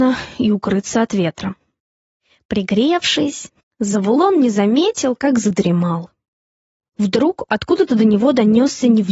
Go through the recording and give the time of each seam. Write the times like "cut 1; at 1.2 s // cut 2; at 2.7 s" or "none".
none